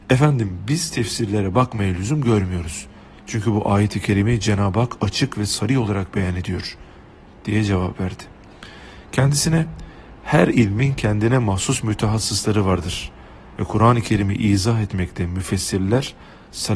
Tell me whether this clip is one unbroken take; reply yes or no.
yes